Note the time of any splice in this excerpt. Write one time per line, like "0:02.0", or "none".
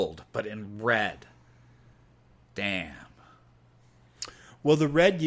0:02.5